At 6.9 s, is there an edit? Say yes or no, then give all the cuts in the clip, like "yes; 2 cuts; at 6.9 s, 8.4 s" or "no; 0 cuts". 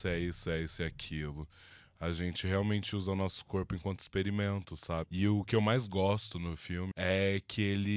yes; 2 cuts; at 5.0 s, 6.9 s